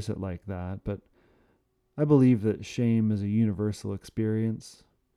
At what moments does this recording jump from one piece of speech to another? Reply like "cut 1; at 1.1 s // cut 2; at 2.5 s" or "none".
none